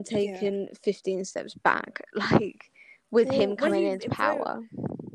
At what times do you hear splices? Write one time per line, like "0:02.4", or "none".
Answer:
none